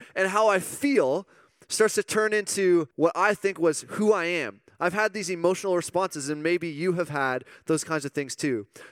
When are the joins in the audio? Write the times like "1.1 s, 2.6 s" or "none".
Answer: 2.9 s